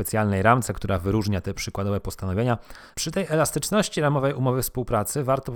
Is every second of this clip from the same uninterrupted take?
no; 1 cut; at 2.9 s

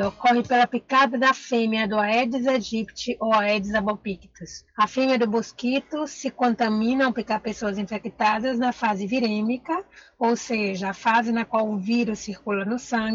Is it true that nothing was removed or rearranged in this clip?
yes; 0 cuts

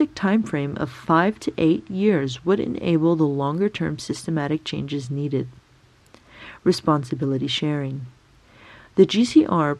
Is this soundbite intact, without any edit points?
yes; 0 cuts

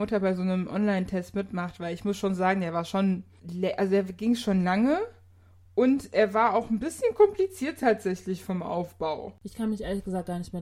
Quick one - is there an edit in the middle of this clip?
no; 0 cuts

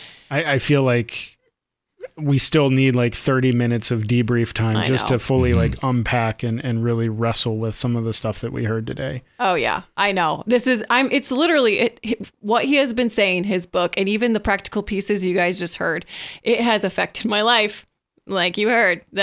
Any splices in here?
no; 0 cuts

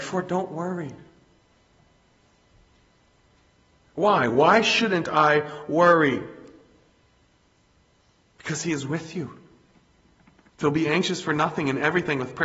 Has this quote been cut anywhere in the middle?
yes; 2 cuts; at 8.3 s, 10.5 s

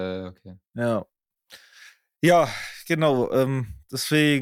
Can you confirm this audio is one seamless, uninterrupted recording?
yes; 0 cuts

